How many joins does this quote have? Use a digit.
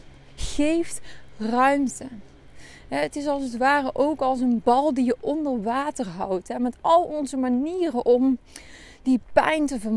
0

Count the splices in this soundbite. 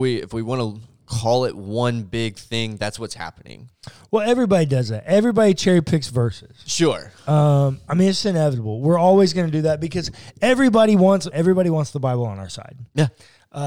2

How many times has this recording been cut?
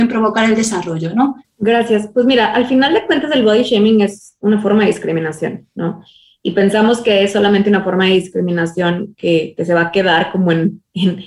1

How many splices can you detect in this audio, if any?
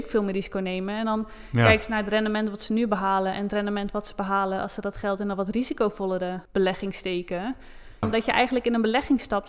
2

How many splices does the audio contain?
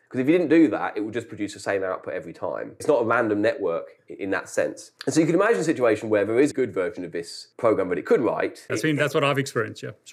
3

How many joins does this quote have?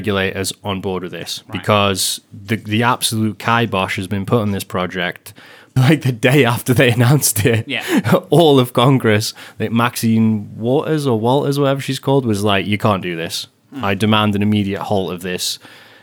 1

